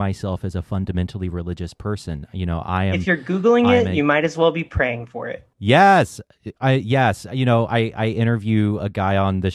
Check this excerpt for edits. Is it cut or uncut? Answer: uncut